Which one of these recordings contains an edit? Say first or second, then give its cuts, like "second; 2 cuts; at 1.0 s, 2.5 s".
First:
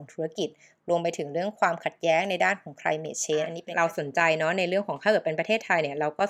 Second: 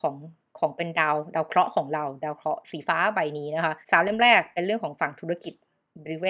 second; 1 cut; at 3.8 s